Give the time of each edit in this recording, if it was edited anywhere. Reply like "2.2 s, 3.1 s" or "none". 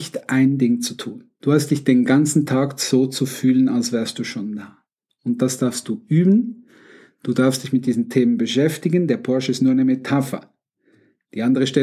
1.4 s